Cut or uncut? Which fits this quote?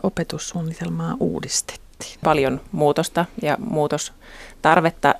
cut